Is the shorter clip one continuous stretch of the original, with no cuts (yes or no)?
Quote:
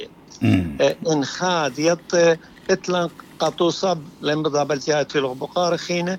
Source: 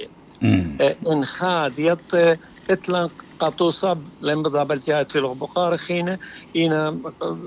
yes